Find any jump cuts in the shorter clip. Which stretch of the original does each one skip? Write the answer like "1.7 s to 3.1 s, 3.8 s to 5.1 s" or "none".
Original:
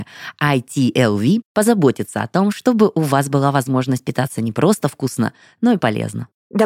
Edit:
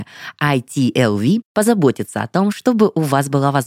none